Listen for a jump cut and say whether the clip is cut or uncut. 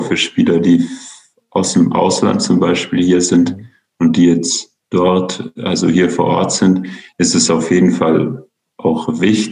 uncut